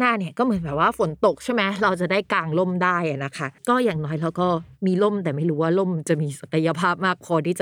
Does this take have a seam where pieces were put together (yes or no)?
yes